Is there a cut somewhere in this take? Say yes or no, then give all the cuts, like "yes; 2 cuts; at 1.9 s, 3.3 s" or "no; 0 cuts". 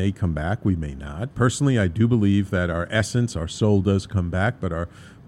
yes; 1 cut; at 1.3 s